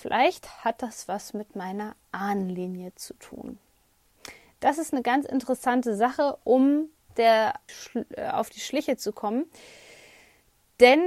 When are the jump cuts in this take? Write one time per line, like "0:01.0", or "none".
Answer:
0:07.7